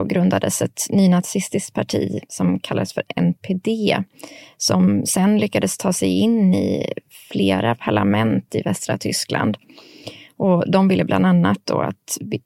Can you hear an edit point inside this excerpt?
no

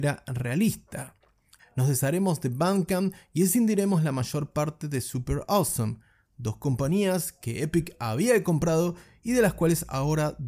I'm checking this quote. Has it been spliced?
yes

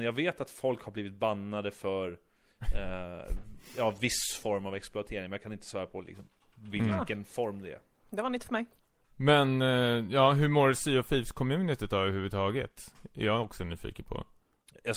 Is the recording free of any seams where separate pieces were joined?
yes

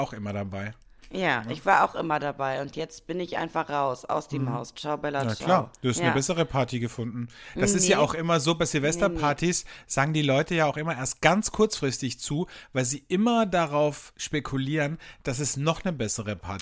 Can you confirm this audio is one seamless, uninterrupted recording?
yes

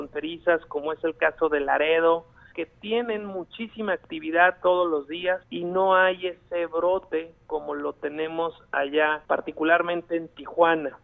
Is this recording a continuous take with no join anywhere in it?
no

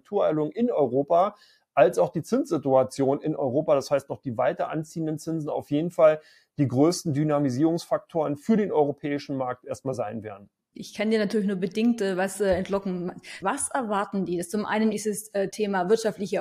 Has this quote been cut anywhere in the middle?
yes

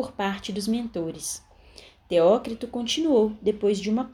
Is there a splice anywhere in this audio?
no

